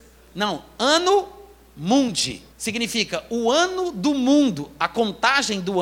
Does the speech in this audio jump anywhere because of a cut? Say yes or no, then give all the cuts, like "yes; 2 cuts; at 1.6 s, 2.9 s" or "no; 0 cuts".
yes; 1 cut; at 2.5 s